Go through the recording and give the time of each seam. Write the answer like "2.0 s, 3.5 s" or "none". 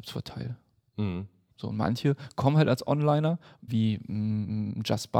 1.5 s, 3.7 s